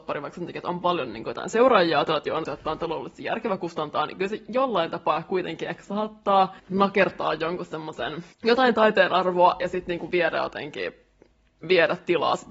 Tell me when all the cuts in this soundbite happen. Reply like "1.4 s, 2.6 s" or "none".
2.5 s, 6.6 s, 8.3 s